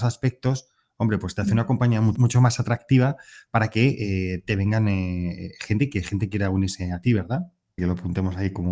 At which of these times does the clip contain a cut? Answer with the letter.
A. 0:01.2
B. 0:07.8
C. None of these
B